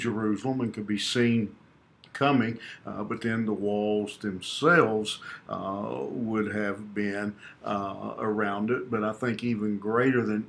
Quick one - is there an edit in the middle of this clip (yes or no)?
no